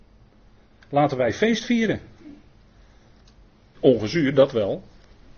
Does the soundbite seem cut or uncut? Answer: cut